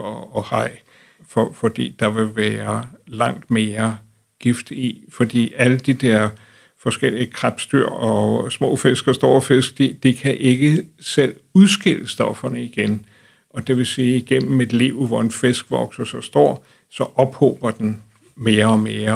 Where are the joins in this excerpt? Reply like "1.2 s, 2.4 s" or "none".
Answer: none